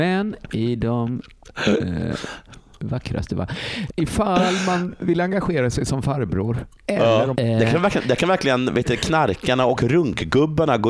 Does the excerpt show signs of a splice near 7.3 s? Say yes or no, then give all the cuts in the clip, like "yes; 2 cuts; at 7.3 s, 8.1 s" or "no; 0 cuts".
yes; 2 cuts; at 3.9 s, 7.3 s